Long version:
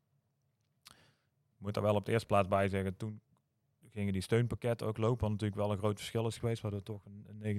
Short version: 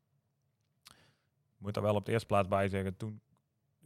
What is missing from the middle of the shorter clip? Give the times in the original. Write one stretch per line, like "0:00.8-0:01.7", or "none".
none